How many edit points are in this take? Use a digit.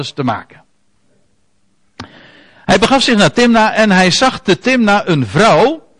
1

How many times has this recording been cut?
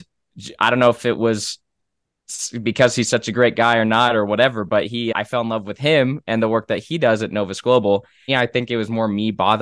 1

